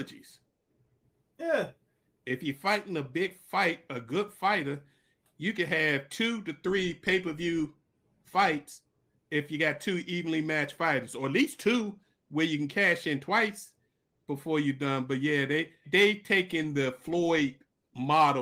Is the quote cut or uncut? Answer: cut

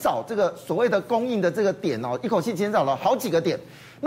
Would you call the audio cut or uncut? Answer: uncut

